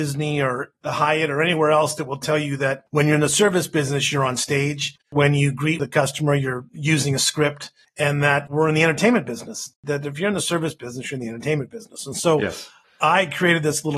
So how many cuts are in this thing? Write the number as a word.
one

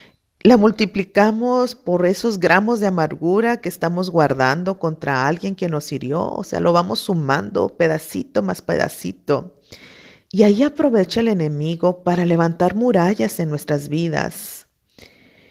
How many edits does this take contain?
zero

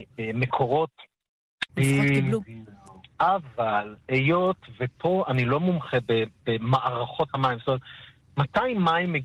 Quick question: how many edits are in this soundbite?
one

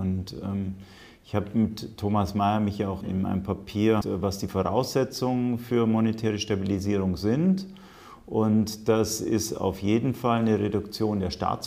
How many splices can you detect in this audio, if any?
two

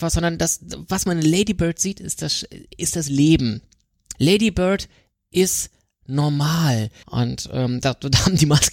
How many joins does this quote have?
two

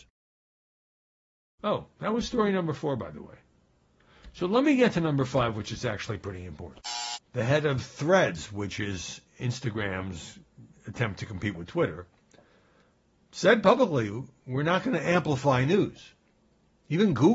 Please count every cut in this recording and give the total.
one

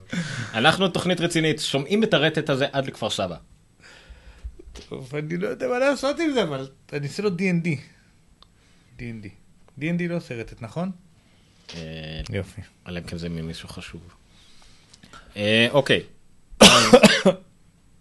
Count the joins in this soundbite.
one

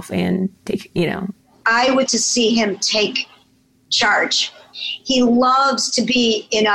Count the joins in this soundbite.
one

